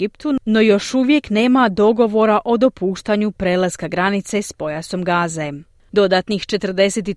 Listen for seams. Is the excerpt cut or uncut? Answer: cut